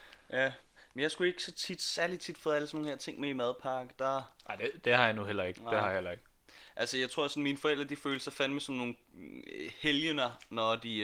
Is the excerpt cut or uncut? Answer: uncut